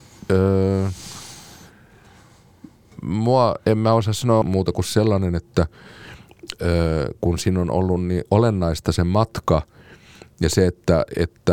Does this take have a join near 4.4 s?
yes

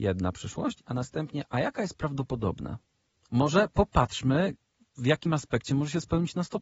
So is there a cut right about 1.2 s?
no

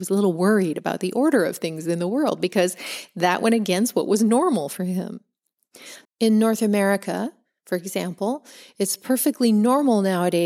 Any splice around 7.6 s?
no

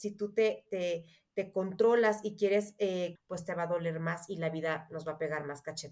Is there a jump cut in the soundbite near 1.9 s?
no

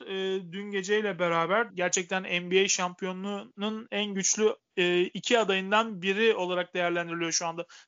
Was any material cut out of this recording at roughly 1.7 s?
yes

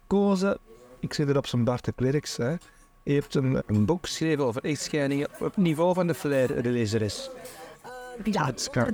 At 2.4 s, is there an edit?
no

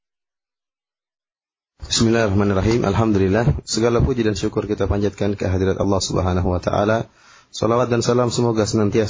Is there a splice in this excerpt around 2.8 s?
no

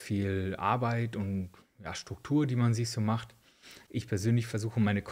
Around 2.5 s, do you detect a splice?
no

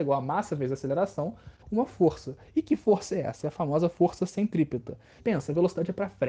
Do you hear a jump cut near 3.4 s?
no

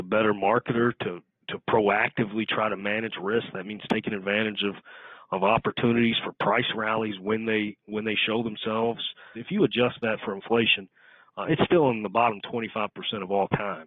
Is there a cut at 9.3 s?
yes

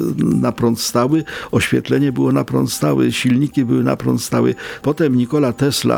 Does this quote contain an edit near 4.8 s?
yes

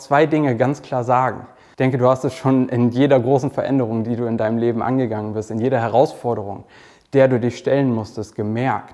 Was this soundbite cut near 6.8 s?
no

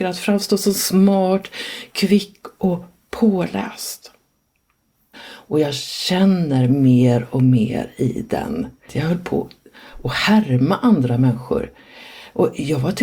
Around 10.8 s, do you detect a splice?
no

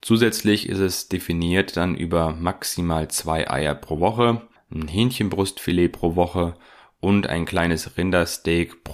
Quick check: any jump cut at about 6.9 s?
no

